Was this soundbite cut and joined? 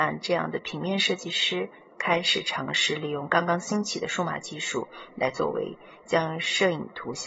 no; 0 cuts

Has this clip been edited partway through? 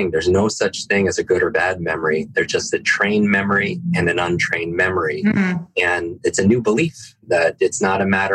no; 0 cuts

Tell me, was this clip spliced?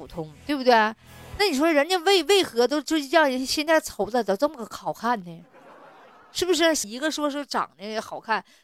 yes; 1 cut; at 6.8 s

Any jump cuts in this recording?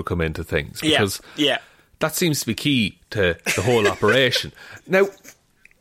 no; 0 cuts

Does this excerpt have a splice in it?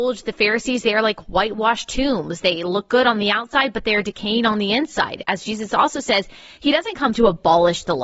no; 0 cuts

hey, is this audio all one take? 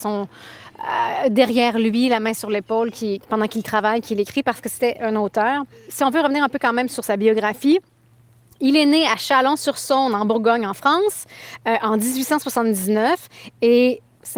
yes; 0 cuts

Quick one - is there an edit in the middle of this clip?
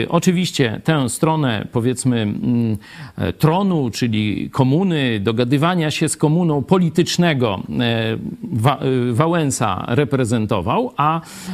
no; 0 cuts

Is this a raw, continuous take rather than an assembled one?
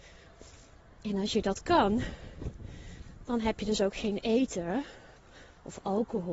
yes; 0 cuts

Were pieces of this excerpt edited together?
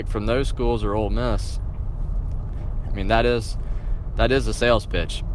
yes; 1 cut; at 2.8 s

